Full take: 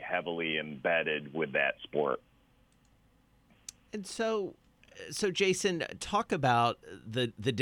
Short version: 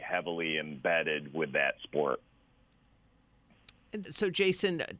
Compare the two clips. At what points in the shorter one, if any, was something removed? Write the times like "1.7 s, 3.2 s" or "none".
4.0 s

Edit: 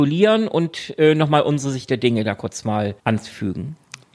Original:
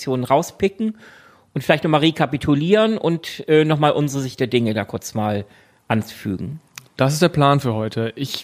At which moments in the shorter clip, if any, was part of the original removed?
3.0 s

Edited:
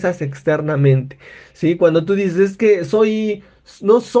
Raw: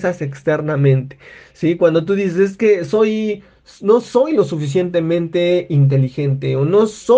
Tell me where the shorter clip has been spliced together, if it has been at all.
none

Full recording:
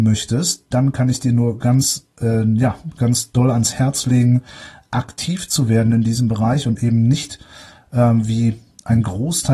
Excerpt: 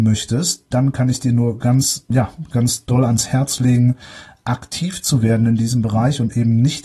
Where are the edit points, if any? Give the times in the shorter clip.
2.1 s

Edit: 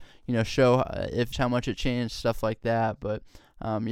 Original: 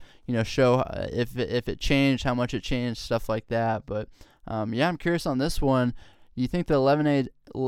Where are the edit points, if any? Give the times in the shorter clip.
1.3 s

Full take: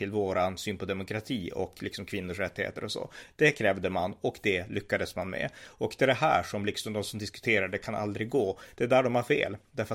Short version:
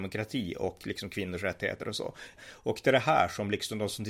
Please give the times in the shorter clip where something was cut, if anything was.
2.4 s

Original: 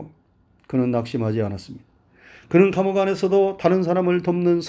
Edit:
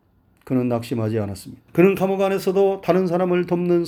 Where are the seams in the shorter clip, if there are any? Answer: 1.7 s

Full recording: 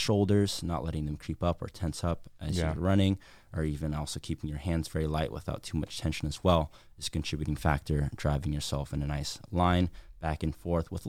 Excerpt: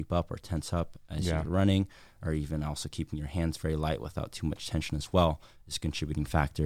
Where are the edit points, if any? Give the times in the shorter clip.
none

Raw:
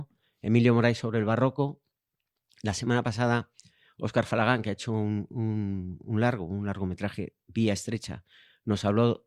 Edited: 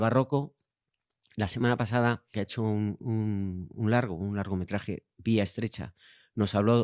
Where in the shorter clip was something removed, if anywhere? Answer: 2.3 s

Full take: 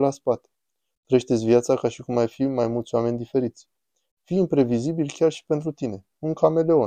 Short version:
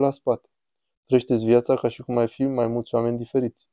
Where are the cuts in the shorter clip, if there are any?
none

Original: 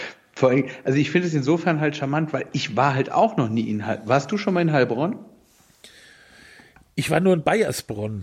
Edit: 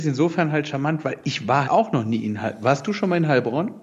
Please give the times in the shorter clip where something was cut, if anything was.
1.6 s

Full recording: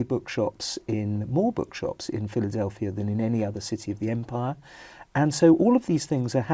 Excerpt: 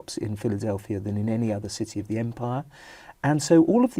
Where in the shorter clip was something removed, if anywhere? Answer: none

